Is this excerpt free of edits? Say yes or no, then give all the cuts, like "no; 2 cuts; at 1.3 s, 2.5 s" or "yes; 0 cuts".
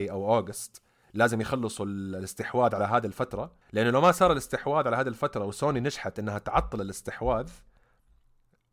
no; 1 cut; at 3.6 s